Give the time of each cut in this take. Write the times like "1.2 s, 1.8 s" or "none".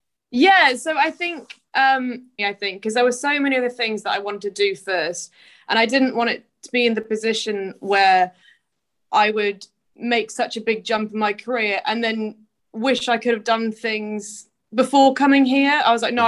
2.4 s